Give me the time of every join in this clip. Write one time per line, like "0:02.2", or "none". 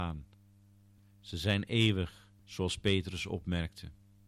0:01.0
0:02.4

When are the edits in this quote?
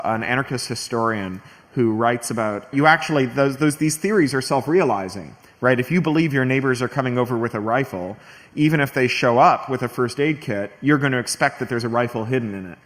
0:02.7

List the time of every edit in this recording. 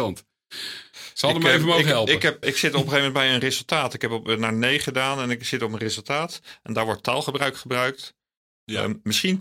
0:02.4

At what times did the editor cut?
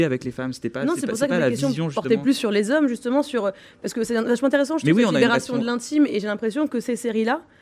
none

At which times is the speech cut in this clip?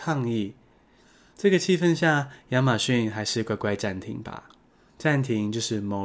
none

